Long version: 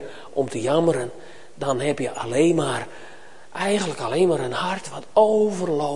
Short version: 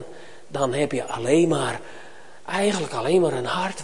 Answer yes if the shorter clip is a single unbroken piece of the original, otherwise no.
yes